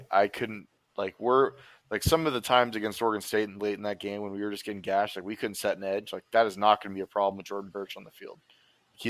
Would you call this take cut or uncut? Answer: uncut